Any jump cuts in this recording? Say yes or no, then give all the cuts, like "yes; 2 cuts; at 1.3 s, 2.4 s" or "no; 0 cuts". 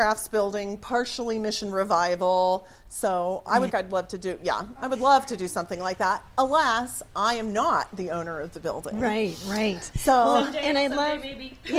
yes; 1 cut; at 3.7 s